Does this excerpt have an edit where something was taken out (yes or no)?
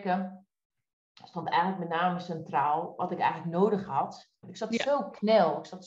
yes